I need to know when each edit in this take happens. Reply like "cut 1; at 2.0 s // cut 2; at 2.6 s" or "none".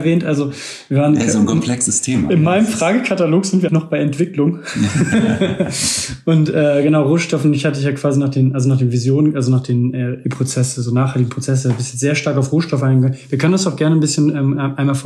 cut 1; at 3.7 s